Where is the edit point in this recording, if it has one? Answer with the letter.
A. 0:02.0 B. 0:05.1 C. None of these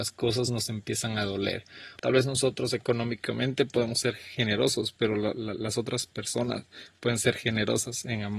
A